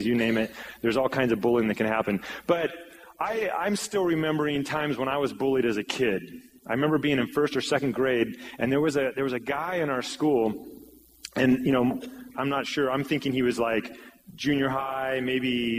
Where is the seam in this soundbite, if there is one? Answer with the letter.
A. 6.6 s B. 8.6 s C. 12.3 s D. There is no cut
C